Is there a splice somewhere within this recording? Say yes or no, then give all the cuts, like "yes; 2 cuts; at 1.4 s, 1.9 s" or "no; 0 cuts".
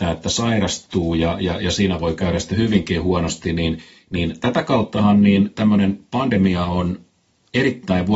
no; 0 cuts